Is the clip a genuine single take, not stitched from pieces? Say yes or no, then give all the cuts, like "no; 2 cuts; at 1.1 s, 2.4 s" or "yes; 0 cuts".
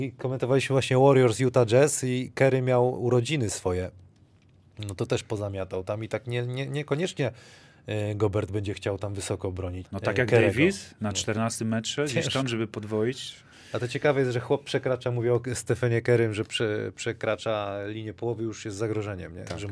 no; 1 cut; at 9.8 s